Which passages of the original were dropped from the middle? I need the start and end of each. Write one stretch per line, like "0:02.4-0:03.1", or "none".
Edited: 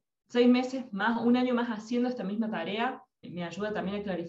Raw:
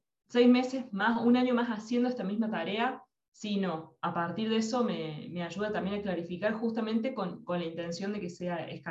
0:03.2-0:05.2